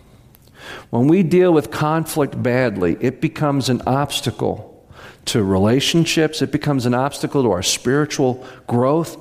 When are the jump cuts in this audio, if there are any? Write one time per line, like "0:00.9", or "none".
none